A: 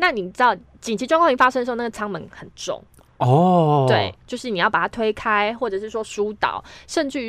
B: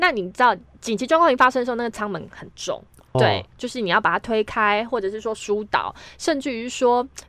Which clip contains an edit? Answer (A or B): B